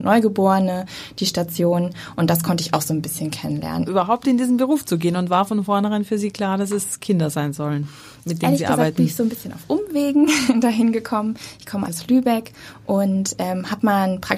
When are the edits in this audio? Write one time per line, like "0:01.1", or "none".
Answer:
0:03.9
0:11.9